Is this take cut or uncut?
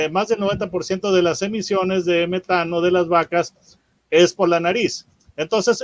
uncut